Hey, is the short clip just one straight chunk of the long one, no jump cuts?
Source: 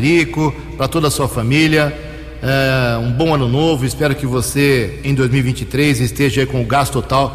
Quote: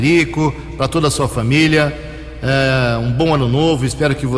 yes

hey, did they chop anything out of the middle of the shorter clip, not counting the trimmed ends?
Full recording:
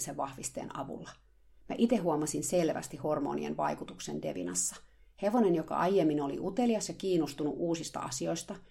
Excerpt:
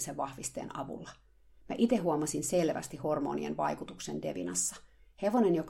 no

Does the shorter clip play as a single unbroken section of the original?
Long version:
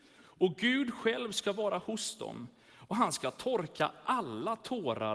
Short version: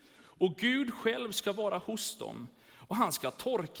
yes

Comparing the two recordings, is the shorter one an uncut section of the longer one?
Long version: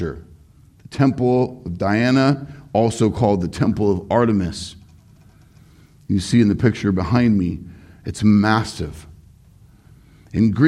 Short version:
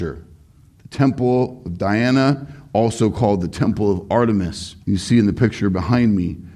no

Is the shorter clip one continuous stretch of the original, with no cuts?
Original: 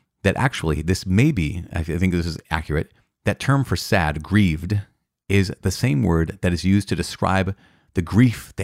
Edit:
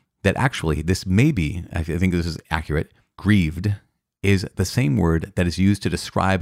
no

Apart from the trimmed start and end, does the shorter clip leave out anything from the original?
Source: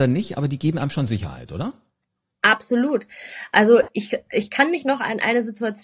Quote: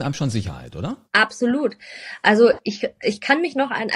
yes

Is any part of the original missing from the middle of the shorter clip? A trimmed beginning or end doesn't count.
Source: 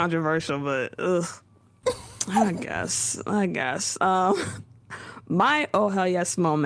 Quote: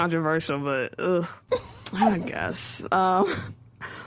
yes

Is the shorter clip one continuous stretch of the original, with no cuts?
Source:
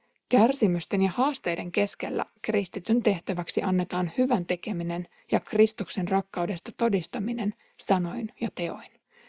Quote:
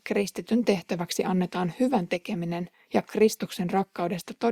yes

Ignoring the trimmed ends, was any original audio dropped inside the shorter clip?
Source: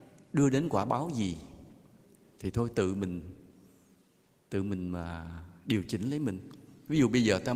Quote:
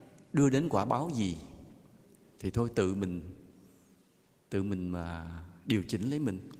no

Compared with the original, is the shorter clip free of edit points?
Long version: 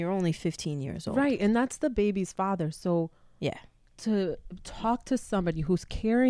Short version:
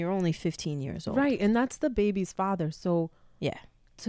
yes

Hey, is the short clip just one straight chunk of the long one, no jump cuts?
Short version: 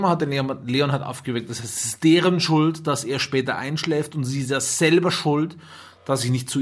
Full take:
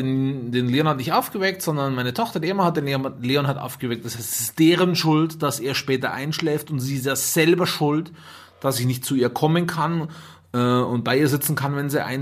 yes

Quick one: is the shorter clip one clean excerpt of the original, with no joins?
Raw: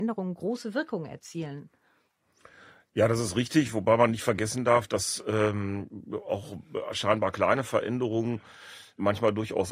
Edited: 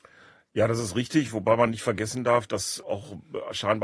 no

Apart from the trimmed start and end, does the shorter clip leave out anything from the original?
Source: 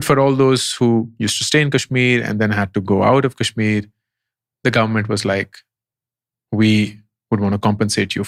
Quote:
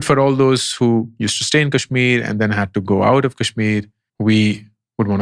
yes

